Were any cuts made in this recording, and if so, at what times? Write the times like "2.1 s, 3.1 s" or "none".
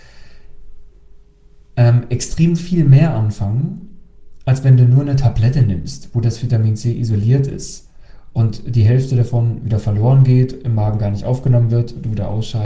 none